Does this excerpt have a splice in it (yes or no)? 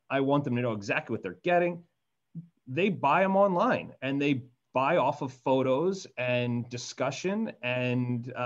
yes